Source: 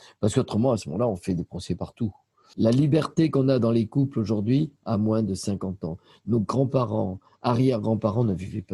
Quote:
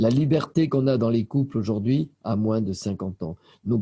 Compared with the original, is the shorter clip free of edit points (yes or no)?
yes